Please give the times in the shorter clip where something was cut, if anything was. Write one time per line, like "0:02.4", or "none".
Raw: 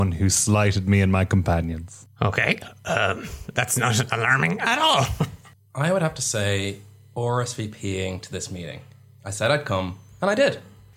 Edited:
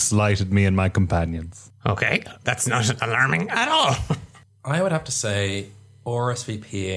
0:02.4